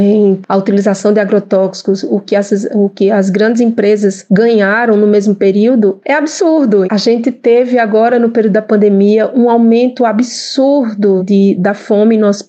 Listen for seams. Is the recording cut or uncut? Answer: cut